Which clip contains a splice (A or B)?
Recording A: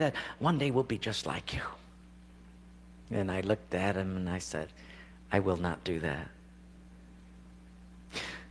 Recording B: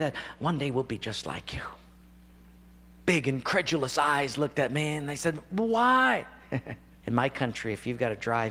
B